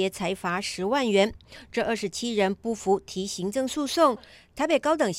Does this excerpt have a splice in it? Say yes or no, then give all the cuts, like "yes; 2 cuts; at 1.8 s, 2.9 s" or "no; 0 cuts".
no; 0 cuts